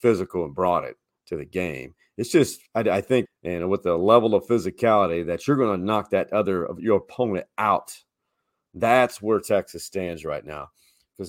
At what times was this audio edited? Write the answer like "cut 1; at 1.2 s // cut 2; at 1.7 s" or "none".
cut 1; at 3.3 s

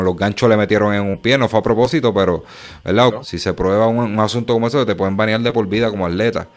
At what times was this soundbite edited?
cut 1; at 3.1 s

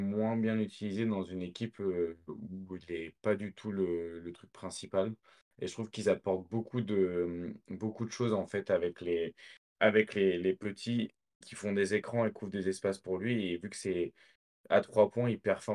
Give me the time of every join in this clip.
cut 1; at 11.4 s

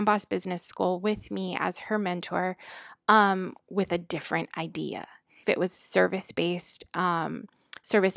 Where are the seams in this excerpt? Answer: cut 1; at 5.4 s

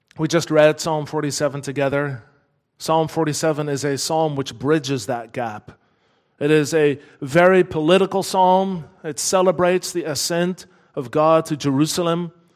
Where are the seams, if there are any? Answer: none

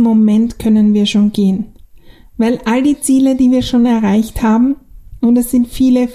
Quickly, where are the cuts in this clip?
none

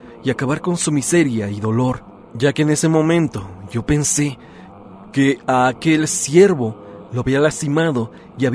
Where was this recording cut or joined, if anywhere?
cut 1; at 7.1 s

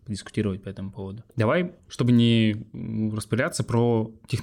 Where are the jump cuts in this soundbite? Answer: cut 1; at 1.3 s

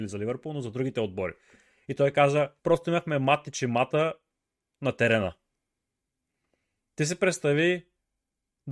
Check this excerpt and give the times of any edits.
cut 1; at 2.6 s

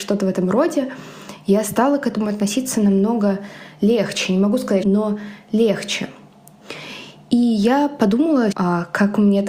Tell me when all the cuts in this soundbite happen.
cut 1; at 4.8 s // cut 2; at 8.5 s

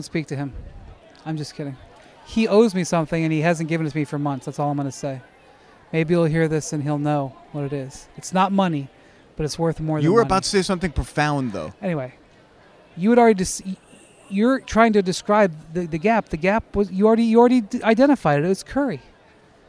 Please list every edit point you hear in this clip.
none

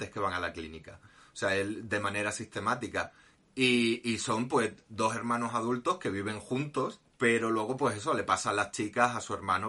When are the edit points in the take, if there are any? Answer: cut 1; at 3.4 s // cut 2; at 7.1 s

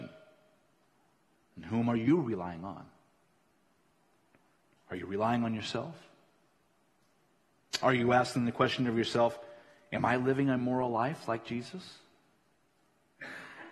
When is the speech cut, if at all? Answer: none

